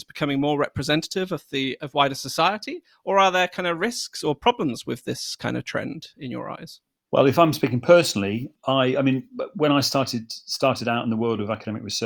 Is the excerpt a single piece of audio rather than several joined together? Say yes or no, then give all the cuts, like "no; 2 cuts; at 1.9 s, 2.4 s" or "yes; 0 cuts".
yes; 0 cuts